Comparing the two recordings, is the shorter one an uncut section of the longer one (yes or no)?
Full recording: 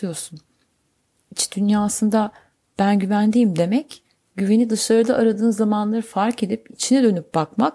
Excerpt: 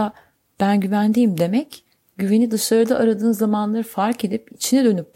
yes